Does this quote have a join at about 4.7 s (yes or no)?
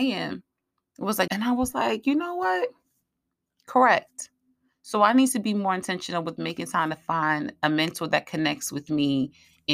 no